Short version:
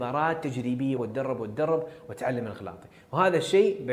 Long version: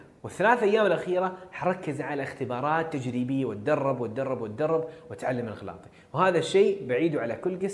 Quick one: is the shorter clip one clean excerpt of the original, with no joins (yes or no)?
no